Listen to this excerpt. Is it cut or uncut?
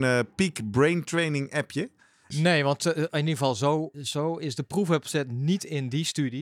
cut